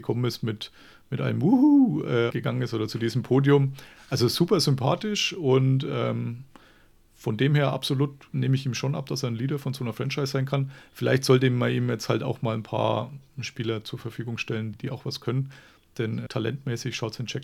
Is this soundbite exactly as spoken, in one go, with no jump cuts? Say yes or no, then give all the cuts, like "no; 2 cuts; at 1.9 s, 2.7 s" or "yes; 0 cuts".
no; 3 cuts; at 2.3 s, 14.7 s, 16.3 s